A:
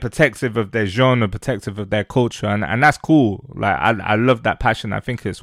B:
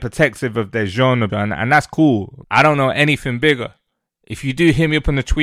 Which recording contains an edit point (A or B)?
B